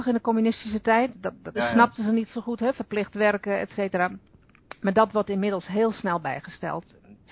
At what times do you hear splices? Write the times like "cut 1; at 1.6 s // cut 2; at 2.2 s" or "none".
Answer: cut 1; at 1.5 s